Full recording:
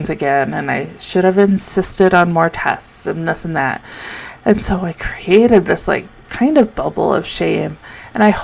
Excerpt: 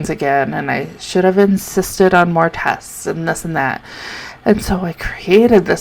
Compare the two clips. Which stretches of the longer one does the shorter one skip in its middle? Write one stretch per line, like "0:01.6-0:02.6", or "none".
none